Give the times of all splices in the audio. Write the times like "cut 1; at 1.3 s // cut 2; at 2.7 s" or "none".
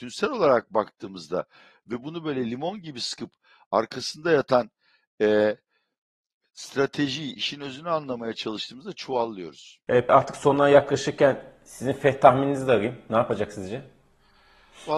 cut 1; at 10.1 s